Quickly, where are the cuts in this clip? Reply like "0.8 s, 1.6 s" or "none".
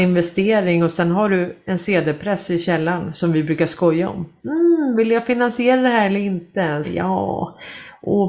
4.4 s, 6.8 s